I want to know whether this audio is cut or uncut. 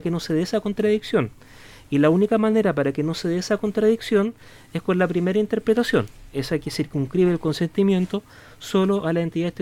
uncut